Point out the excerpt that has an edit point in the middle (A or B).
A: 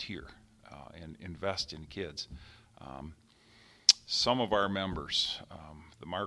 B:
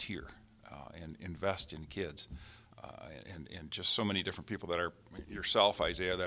B